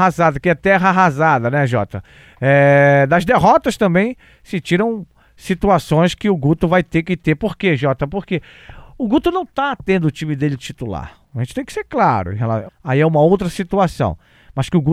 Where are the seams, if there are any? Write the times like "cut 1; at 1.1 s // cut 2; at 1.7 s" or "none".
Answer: cut 1; at 12.7 s